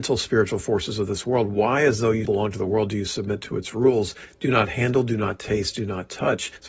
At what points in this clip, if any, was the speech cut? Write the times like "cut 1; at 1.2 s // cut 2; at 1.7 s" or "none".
cut 1; at 2.2 s